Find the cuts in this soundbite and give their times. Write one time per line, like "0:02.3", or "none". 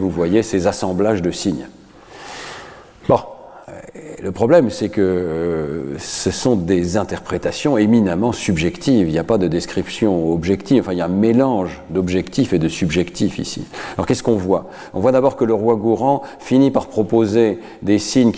none